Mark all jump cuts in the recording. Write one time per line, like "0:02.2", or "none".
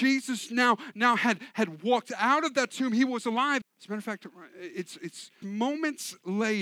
0:03.6
0:05.4